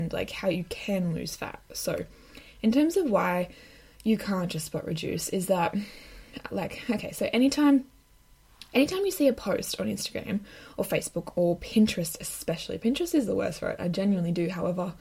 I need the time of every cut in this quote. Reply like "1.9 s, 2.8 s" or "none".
13.8 s